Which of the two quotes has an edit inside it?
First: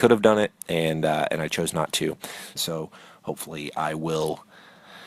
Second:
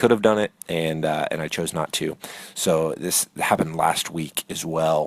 first; 1 cut; at 2.6 s

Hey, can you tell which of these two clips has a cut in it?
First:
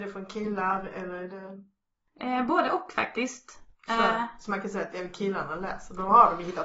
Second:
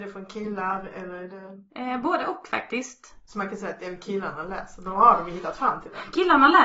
second; 2 cuts; at 1.7 s, 3.3 s

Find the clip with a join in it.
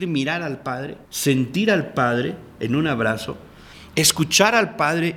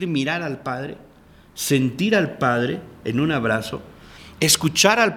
first; 1 cut; at 1.0 s

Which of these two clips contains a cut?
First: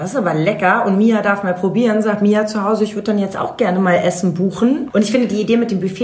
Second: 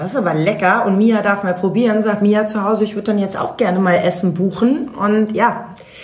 first; 1 cut; at 4.9 s

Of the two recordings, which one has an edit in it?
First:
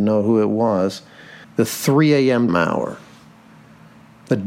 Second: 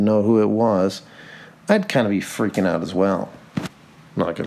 first; 2 cuts; at 1.4 s, 2.5 s

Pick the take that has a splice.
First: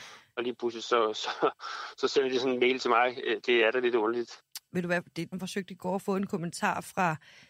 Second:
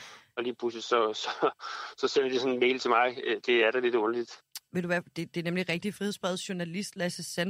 first; 1 cut; at 5.3 s

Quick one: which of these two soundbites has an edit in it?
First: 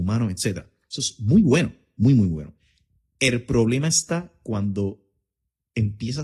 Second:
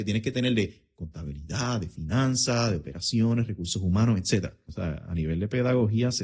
second; 1 cut; at 4.7 s

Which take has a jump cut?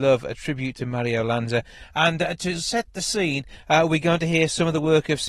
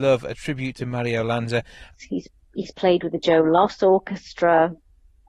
second; 1 cut; at 1.9 s

